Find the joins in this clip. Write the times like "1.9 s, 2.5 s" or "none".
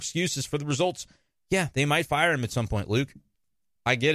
none